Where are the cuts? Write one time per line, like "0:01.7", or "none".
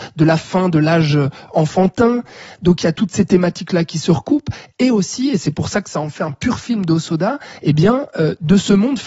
none